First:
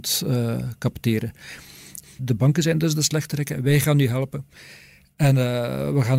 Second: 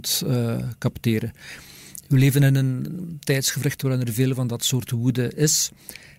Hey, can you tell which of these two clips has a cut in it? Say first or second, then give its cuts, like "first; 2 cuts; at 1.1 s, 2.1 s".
first; 1 cut; at 2.0 s